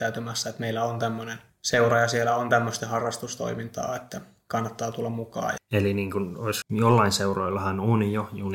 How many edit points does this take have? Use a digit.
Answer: 2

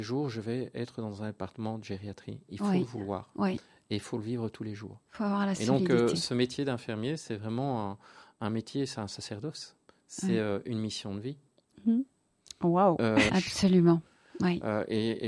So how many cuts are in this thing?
2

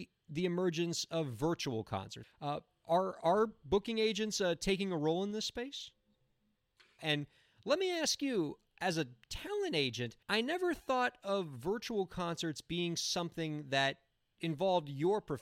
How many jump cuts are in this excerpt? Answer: 3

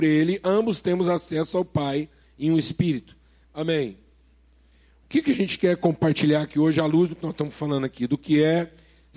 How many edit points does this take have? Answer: 1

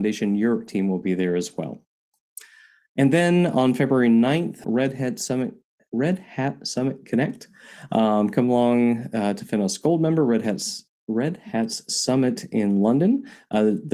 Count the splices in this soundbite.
1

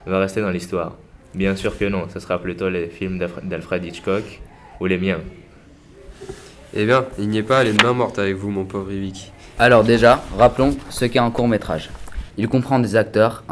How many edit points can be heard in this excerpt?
2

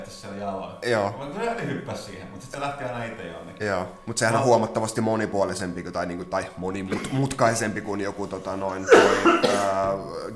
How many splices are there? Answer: 0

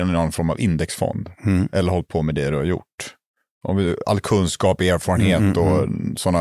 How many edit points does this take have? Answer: 0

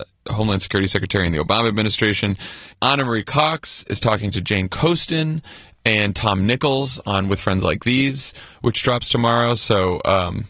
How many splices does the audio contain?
1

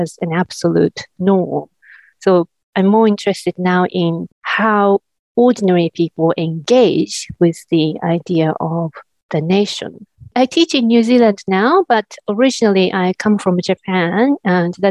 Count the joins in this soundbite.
3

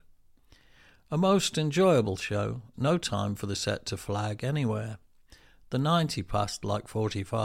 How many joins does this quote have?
1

